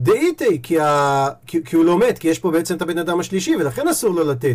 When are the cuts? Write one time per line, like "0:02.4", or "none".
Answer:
none